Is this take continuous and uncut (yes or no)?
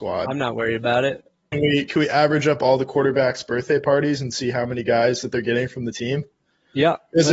no